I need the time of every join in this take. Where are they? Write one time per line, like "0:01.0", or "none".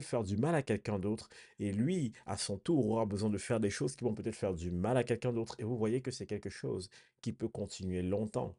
none